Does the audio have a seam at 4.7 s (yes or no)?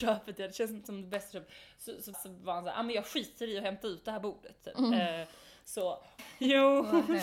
yes